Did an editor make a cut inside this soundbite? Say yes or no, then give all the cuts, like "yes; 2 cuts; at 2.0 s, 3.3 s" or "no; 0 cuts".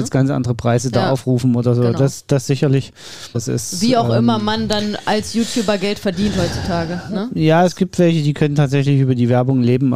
yes; 1 cut; at 3.3 s